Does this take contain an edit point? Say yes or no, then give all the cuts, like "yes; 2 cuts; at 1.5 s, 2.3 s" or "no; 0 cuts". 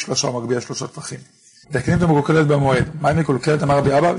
yes; 1 cut; at 1.6 s